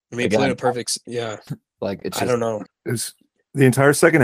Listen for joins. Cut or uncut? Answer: cut